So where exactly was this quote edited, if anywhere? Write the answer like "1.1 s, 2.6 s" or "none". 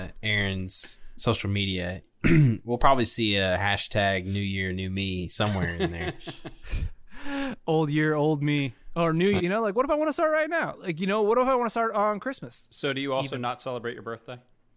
9.4 s